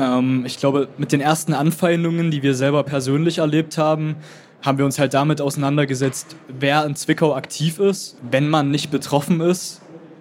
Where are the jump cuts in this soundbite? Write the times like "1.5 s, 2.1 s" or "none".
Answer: 8.2 s